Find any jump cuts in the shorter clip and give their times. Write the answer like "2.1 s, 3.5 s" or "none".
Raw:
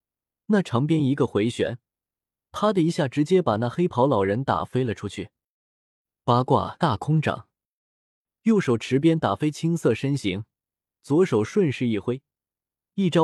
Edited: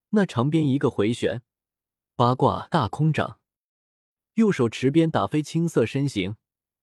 2.0 s